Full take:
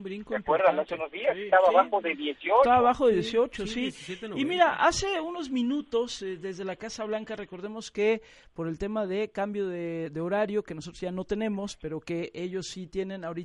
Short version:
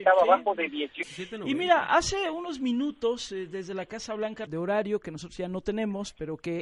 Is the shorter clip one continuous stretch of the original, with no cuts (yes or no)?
no